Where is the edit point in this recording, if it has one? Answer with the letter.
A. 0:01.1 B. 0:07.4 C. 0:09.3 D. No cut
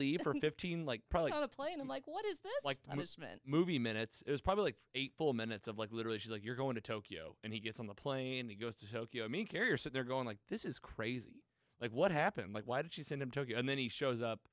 A